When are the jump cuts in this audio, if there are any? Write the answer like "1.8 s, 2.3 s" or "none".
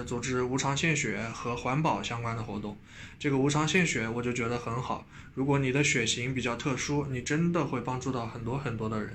none